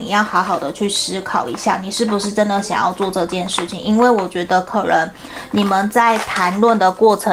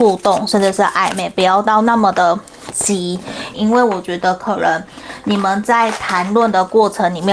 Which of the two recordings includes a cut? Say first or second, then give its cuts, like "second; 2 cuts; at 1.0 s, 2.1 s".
second; 1 cut; at 3.5 s